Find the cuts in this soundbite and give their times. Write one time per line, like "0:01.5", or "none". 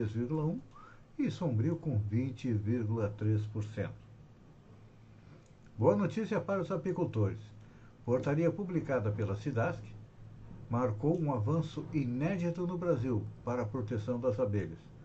none